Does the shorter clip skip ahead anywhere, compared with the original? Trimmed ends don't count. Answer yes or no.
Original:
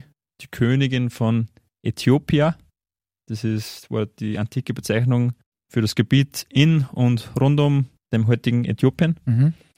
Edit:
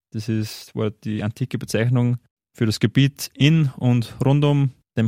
no